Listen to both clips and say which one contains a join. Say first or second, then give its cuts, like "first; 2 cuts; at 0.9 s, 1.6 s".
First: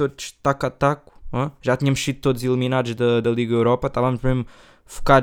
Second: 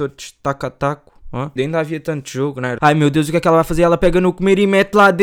second; 2 cuts; at 1.6 s, 2.8 s